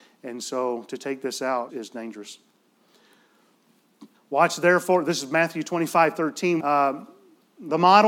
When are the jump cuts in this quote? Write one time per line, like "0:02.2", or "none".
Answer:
0:01.7
0:04.1
0:06.6